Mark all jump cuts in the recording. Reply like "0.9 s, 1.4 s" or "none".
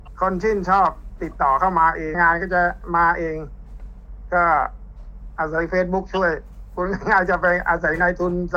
2.1 s